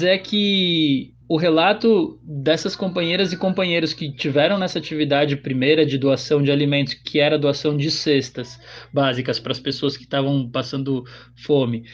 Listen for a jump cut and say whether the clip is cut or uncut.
cut